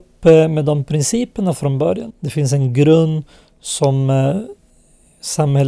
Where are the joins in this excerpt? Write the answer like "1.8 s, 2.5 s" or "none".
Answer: 2.1 s